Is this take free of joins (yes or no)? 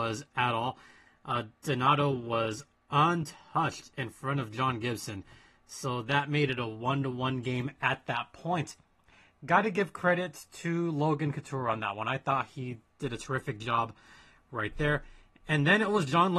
yes